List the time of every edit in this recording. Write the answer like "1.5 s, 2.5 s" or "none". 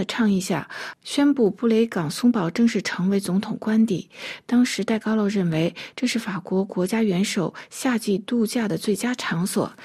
none